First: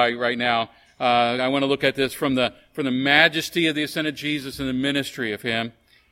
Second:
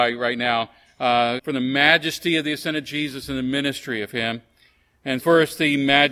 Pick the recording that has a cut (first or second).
second